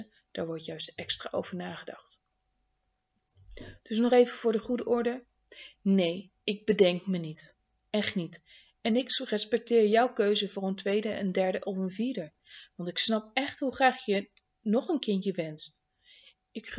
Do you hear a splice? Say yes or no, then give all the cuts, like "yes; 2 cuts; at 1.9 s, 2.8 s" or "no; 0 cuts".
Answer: no; 0 cuts